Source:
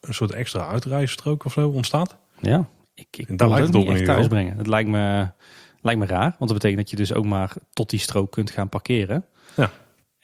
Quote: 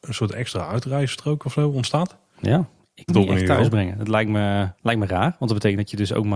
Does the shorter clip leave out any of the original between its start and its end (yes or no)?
yes